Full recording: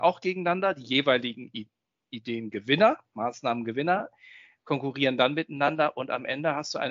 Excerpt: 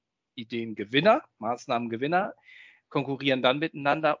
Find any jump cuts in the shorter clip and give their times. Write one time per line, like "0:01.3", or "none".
none